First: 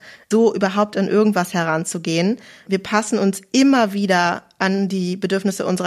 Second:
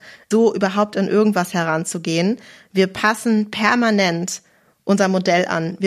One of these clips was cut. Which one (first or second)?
first